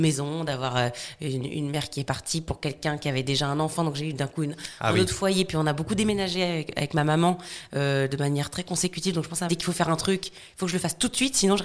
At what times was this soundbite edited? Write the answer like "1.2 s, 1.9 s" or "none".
9.5 s